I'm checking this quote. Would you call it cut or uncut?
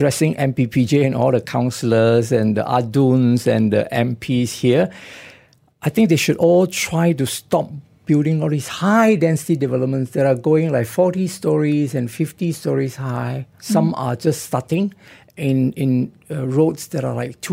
cut